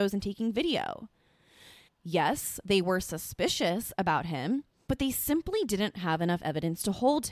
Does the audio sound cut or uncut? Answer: cut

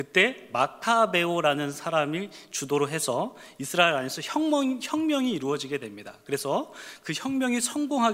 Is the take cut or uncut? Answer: uncut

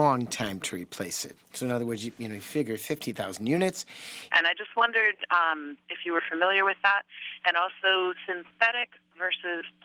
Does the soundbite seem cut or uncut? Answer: cut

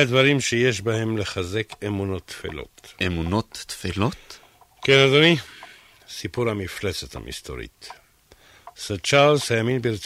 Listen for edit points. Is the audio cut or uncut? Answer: uncut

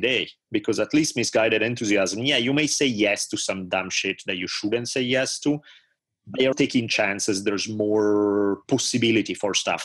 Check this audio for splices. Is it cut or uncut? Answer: cut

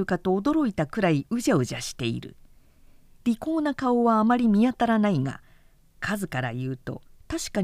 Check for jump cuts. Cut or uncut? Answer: uncut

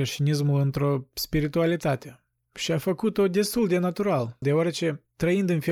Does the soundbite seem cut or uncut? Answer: cut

